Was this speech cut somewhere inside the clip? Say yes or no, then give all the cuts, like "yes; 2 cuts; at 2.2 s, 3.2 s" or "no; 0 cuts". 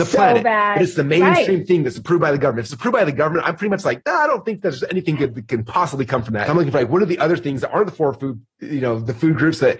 yes; 1 cut; at 6.5 s